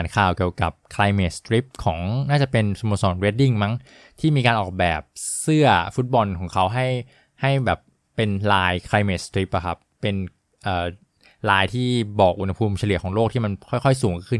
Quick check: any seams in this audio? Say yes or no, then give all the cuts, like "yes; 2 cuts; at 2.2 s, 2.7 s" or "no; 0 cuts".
no; 0 cuts